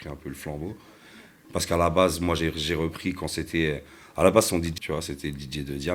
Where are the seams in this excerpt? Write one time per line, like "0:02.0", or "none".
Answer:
0:01.4
0:04.8